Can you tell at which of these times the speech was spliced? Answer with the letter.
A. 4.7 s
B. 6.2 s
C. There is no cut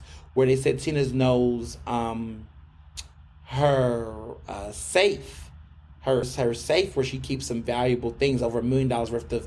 B